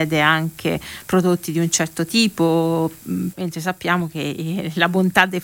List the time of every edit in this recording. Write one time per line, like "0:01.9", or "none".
0:03.3